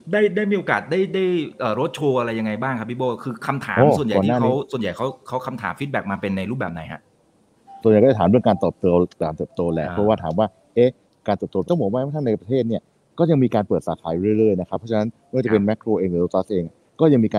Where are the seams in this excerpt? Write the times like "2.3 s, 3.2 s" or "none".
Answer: 11.6 s